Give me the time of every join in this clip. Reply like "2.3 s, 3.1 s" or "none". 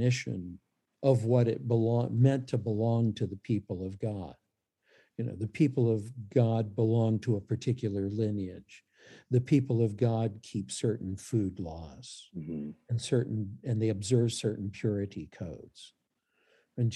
none